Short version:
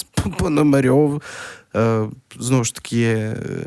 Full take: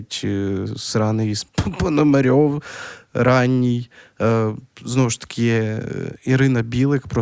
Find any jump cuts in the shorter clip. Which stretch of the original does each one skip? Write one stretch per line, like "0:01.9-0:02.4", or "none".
0:03.1-0:04.1